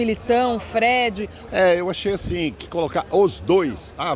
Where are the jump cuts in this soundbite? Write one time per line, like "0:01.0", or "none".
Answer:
0:01.5